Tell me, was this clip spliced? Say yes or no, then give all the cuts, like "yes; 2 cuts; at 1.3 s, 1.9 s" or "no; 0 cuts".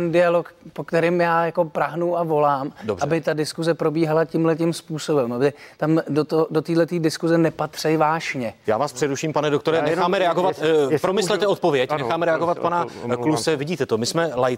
yes; 1 cut; at 8.6 s